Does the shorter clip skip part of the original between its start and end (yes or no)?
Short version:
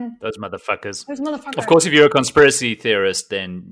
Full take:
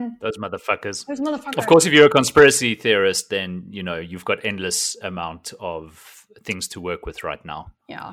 no